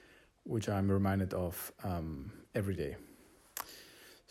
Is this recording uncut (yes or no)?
yes